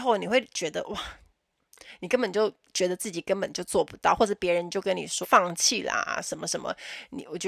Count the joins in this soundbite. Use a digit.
1